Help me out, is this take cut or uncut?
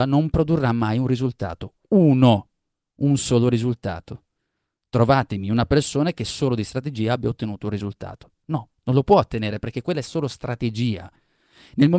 uncut